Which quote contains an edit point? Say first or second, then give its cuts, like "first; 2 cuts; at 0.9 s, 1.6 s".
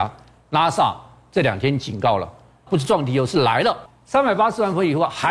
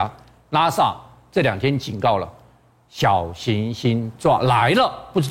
first; 2 cuts; at 2.7 s, 3.9 s